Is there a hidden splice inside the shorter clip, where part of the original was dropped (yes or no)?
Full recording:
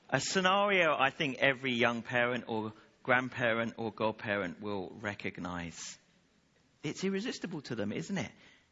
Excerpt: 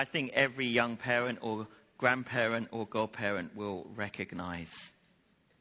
no